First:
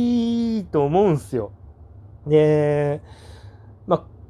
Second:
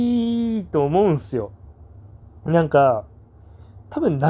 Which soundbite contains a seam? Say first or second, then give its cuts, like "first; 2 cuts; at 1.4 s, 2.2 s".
first; 1 cut; at 2.2 s